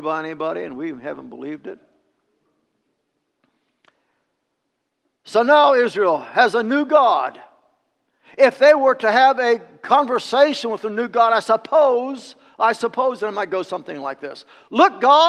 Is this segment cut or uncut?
uncut